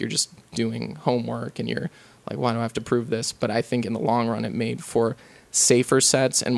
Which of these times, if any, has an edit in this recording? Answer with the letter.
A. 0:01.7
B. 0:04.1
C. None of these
C